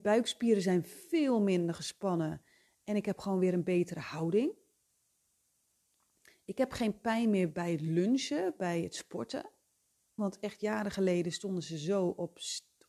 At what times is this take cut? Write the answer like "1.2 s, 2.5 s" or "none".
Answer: 10.2 s